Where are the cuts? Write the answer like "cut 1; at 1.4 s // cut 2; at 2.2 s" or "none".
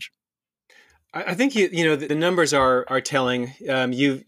cut 1; at 2.1 s